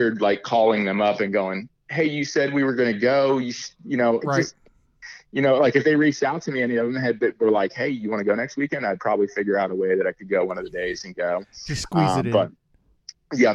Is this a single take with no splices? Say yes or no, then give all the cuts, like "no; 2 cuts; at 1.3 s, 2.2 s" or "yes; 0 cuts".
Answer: no; 1 cut; at 4.2 s